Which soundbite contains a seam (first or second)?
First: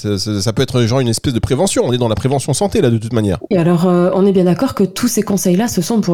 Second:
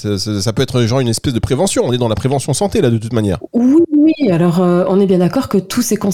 first